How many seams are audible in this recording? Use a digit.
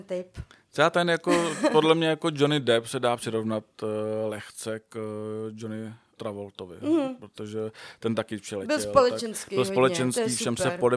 1